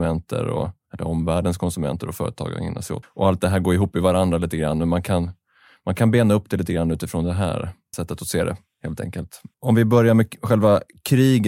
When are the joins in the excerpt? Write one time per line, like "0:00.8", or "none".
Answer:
0:03.0